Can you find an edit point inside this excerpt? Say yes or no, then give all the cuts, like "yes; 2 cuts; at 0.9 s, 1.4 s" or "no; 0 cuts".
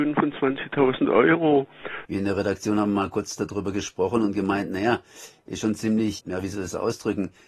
yes; 2 cuts; at 2.0 s, 6.2 s